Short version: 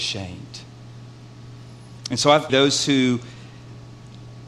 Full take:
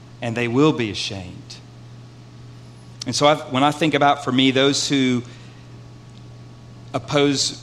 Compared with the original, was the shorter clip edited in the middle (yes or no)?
yes